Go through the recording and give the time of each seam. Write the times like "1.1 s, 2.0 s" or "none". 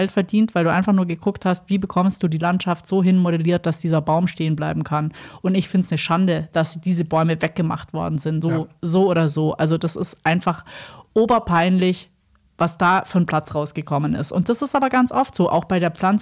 8.4 s